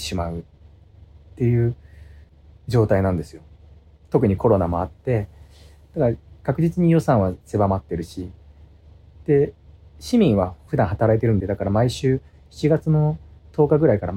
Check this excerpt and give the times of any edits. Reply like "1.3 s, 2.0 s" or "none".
11.4 s